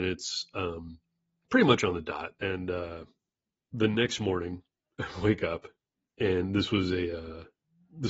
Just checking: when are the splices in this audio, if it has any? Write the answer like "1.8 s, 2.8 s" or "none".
2.4 s